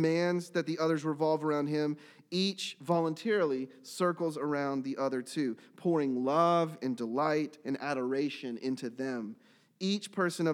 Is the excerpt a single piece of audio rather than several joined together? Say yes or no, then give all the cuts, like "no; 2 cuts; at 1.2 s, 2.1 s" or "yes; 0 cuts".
yes; 0 cuts